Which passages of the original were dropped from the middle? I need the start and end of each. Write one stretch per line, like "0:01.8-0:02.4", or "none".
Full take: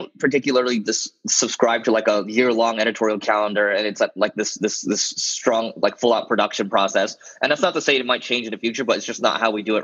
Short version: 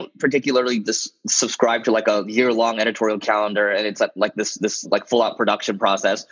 0:04.8-0:05.7